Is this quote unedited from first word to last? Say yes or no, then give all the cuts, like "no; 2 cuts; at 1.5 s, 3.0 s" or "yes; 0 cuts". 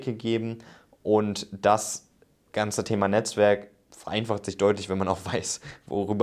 yes; 0 cuts